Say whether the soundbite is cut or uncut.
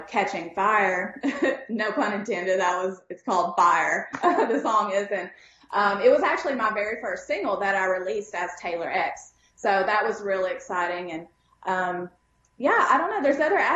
uncut